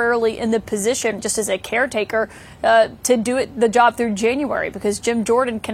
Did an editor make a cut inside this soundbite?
yes; 1 cut; at 1.2 s

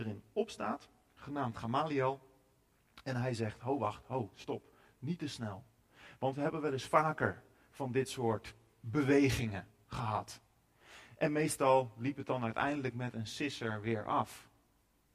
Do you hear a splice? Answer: no; 0 cuts

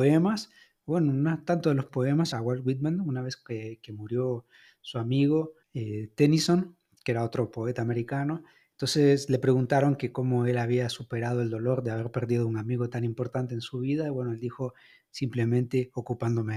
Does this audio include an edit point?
yes; 2 cuts; at 2.3 s, 5.6 s

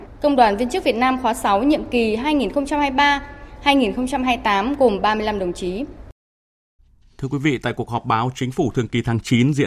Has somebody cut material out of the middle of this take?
no; 0 cuts

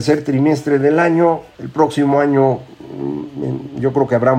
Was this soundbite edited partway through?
yes; 1 cut; at 1.5 s

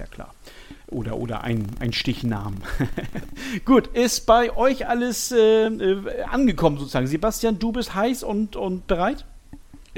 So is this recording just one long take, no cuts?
yes; 0 cuts

